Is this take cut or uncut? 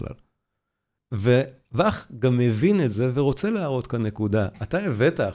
cut